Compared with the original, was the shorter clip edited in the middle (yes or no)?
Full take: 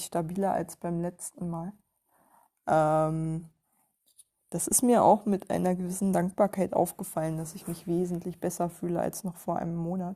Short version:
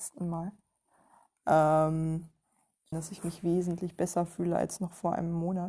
yes